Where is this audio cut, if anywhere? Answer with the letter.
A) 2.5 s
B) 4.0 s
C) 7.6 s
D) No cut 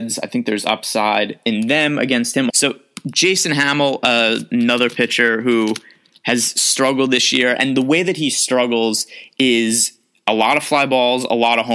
A